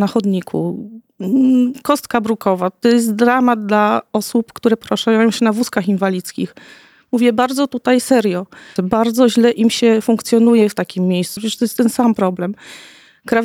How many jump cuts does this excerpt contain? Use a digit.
2